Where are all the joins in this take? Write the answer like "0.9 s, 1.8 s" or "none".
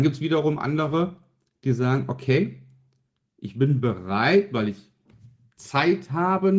none